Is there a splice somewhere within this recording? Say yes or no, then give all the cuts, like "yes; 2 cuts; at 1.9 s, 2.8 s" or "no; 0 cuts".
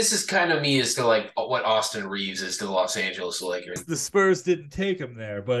yes; 1 cut; at 3.8 s